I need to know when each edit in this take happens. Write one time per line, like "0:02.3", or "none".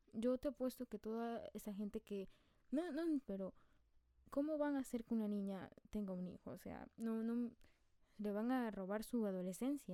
0:03.2